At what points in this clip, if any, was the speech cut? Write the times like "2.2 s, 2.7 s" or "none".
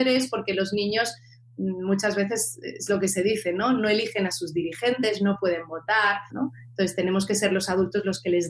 6.3 s